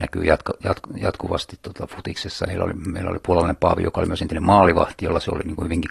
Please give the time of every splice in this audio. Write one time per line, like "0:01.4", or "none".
0:02.5